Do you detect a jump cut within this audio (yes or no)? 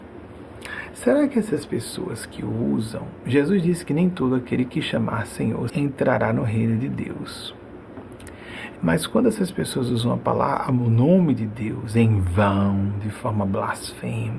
yes